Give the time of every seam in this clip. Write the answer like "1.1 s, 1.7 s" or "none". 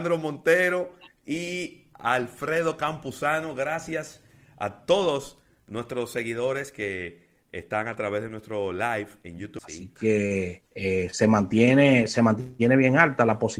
9.6 s, 10.7 s

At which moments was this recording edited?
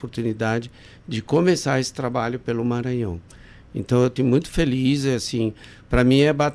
4.2 s

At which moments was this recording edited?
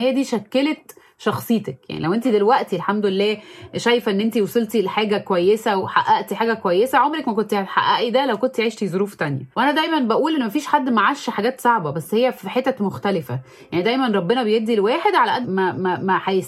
9.5 s, 15.4 s

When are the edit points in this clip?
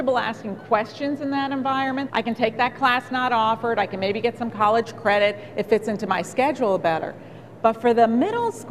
2.1 s

